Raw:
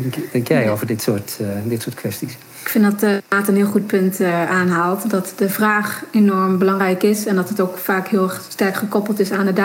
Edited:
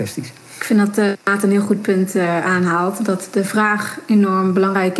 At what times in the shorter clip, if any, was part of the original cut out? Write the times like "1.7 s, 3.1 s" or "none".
none

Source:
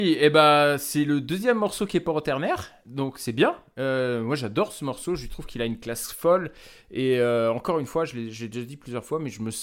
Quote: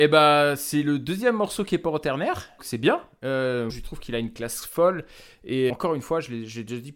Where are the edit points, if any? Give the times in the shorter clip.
2.6 s, 3.7 s, 5.7 s

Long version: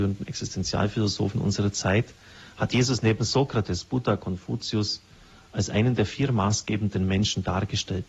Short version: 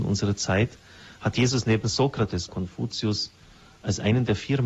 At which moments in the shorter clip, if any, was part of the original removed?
2.5 s

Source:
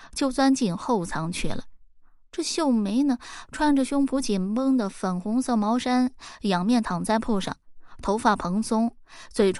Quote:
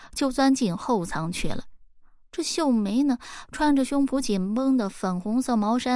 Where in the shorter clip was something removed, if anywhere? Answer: none

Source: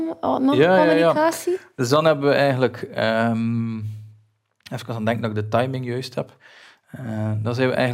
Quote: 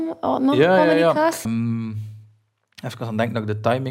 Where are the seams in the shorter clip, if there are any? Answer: 1.5 s

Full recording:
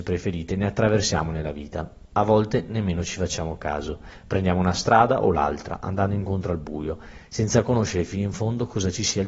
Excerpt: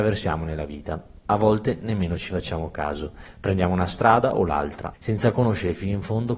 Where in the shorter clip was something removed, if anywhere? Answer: 4.9 s

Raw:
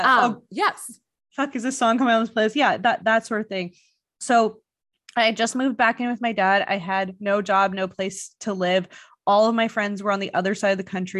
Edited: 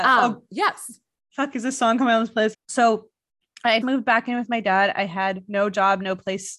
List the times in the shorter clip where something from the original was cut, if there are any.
2.5 s, 3.8 s

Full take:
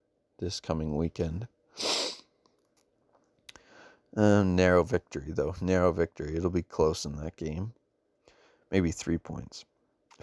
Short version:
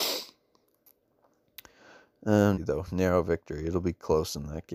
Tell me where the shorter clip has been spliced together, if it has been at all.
2.5 s

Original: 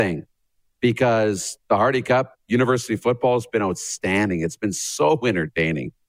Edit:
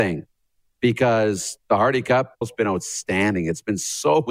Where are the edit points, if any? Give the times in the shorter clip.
2.4 s

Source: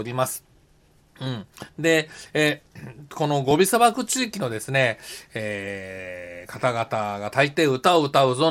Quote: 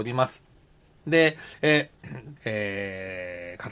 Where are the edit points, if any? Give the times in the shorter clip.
1.0 s, 2.4 s

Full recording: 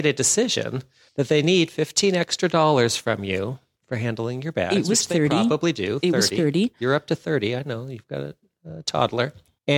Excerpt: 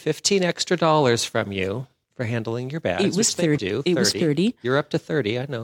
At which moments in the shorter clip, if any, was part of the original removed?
3.6 s

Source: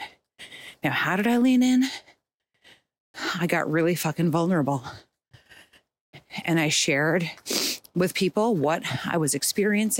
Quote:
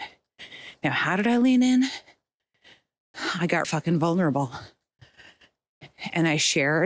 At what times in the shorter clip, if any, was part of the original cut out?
3.6 s

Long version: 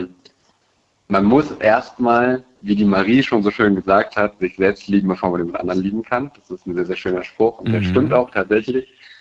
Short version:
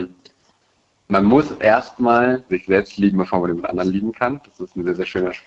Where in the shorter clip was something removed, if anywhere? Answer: 2.5 s

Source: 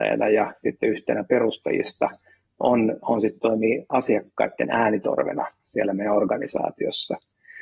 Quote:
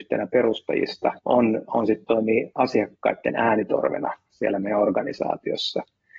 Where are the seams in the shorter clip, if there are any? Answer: 1.2 s

